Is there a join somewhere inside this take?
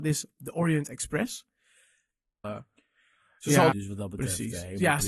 yes; 2 cuts; at 2.4 s, 3.7 s

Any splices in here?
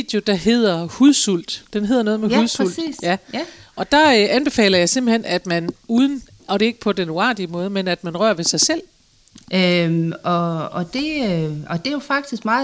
yes; 1 cut; at 9.4 s

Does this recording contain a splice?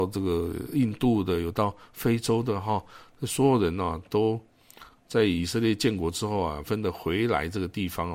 yes; 1 cut; at 6.7 s

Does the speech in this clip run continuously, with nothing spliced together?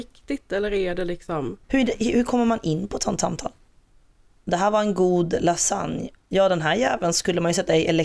no; 2 cuts; at 1.6 s, 6.1 s

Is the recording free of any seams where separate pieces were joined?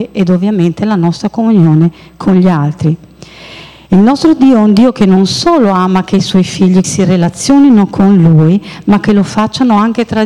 no; 1 cut; at 6.8 s

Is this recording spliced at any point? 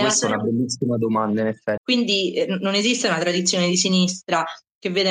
yes; 1 cut; at 1.8 s

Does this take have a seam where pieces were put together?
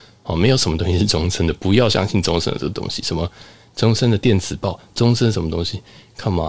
no; 0 cuts

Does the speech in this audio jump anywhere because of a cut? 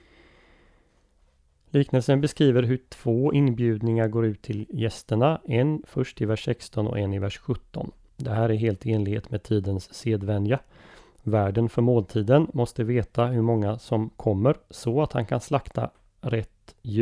no; 0 cuts

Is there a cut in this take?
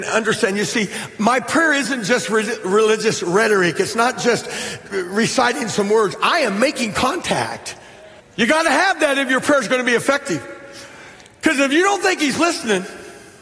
yes; 1 cut; at 8.2 s

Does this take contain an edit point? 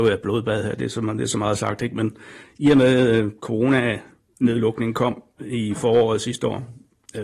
no; 0 cuts

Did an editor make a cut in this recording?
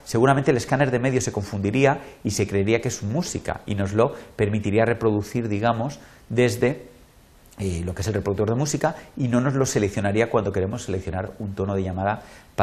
no; 0 cuts

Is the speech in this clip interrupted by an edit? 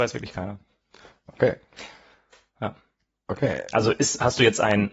no; 0 cuts

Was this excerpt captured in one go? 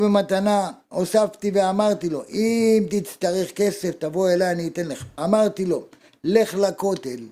no; 1 cut; at 5.2 s

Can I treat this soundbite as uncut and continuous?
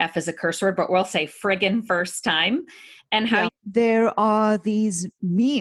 no; 1 cut; at 3.5 s

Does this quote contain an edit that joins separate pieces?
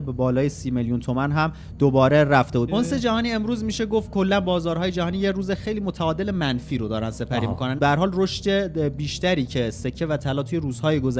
yes; 2 cuts; at 2.7 s, 7.8 s

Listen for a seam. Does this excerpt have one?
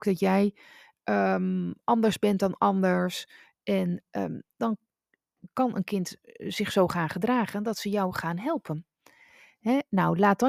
no; 0 cuts

